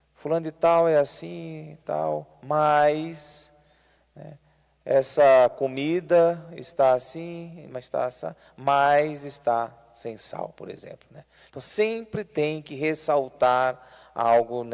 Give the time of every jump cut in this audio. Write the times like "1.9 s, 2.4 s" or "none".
none